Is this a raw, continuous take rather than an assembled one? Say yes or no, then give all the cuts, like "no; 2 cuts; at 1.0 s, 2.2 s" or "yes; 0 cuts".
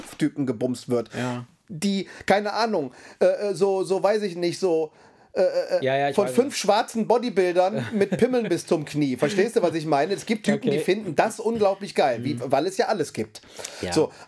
yes; 0 cuts